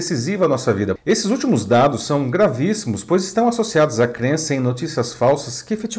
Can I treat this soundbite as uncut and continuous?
no; 1 cut; at 1.0 s

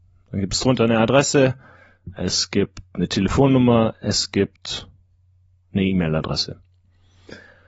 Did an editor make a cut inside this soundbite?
no; 0 cuts

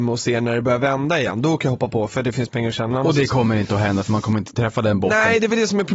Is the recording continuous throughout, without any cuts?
yes; 0 cuts

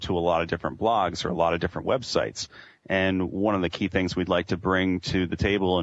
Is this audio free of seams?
yes; 0 cuts

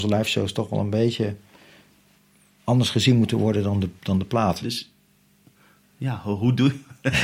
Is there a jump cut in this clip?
yes; 1 cut; at 4.6 s

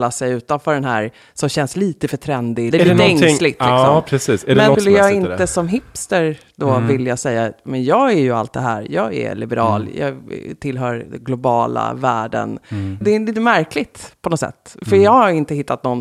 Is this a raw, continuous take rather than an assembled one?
no; 3 cuts; at 2.7 s, 4.7 s, 13.0 s

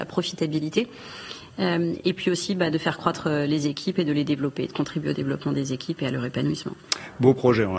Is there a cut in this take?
no; 0 cuts

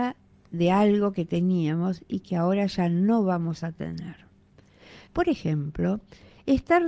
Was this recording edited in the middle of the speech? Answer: yes; 1 cut; at 5.1 s

